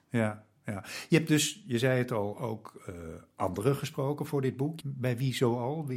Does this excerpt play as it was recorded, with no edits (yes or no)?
no